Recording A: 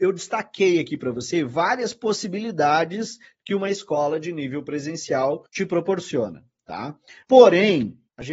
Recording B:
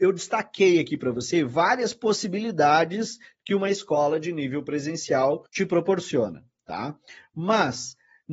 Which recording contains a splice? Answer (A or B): A